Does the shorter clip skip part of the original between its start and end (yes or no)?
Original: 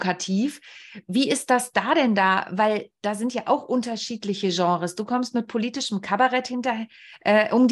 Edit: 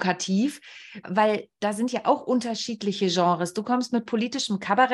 yes